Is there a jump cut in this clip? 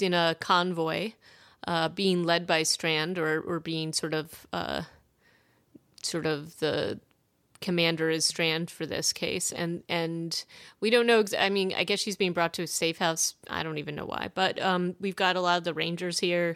no; 0 cuts

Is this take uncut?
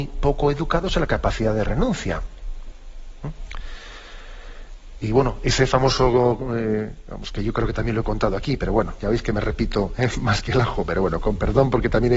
yes; 0 cuts

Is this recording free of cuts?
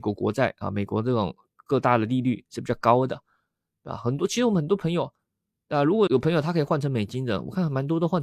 no; 1 cut; at 6.1 s

